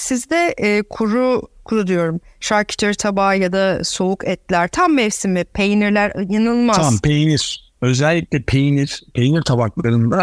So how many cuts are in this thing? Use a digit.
0